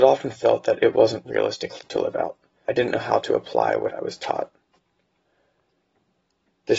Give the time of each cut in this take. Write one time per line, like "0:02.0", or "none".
0:02.7

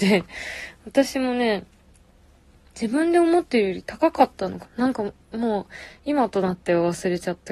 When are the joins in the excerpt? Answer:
0:04.6

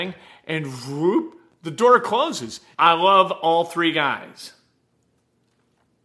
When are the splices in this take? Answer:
0:02.7

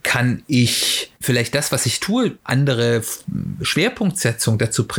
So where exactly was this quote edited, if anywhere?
0:01.2
0:02.4

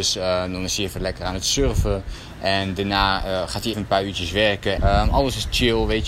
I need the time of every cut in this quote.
0:03.7
0:04.8

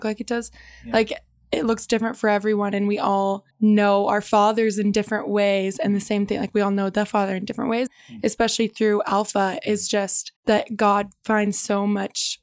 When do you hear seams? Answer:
0:03.5
0:07.9
0:10.4

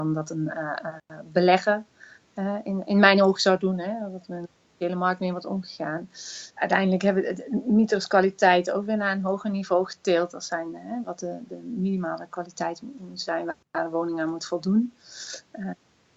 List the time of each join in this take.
0:06.6
0:11.0

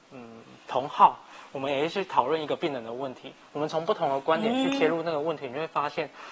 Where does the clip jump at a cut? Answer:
none

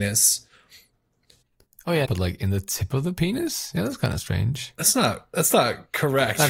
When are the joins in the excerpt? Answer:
0:02.1

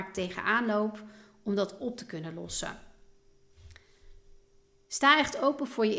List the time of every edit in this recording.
none

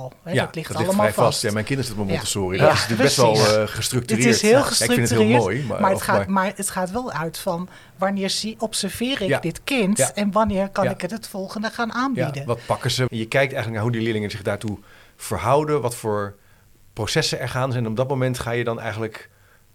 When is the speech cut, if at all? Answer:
0:13.1

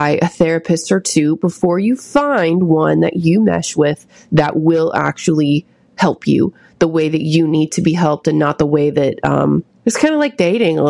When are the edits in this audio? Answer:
0:09.8

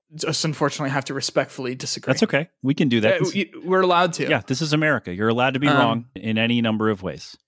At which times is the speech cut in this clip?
0:06.2

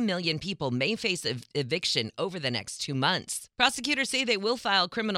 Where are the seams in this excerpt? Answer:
0:03.5

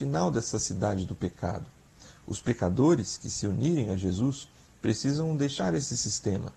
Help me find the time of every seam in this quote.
none

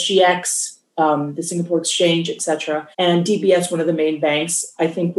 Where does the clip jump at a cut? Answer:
0:02.9

